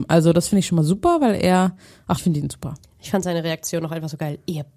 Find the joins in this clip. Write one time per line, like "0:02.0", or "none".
0:02.2

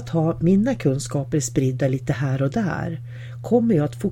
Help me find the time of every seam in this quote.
none

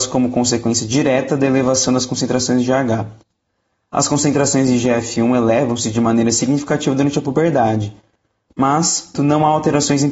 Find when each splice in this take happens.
0:09.1

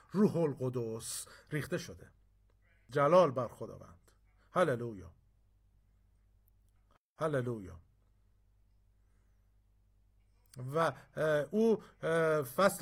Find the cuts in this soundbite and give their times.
none

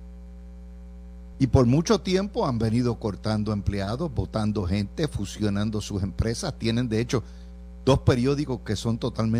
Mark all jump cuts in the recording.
0:01.3

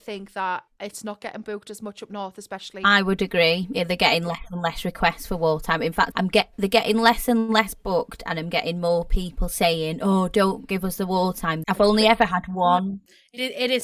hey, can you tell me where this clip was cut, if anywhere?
0:06.1
0:11.6

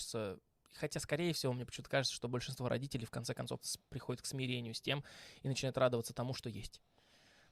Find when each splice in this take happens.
0:03.6

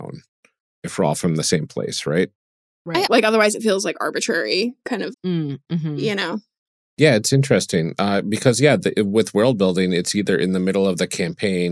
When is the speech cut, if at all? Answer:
0:03.1
0:05.1

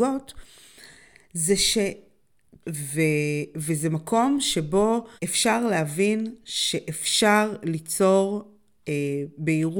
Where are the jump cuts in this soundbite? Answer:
0:02.6
0:05.2

